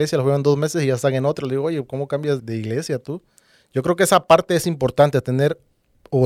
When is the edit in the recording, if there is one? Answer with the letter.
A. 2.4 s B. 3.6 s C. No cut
A